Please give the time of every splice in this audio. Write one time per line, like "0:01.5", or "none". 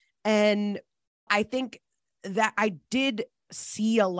0:01.3